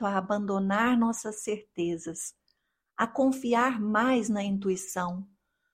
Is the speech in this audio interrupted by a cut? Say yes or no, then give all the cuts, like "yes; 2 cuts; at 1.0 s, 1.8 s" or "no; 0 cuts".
no; 0 cuts